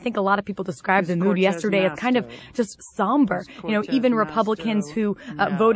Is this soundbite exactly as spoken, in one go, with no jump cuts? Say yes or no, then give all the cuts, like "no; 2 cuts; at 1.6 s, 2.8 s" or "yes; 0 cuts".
yes; 0 cuts